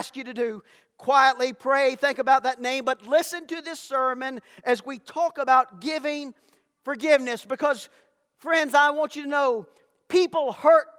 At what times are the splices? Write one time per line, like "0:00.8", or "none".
none